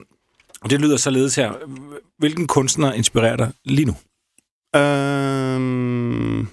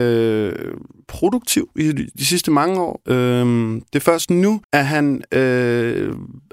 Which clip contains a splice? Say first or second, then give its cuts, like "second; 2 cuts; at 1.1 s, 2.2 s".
second; 2 cuts; at 3.0 s, 4.6 s